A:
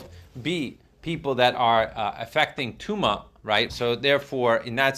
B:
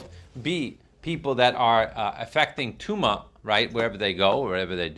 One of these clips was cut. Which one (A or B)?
A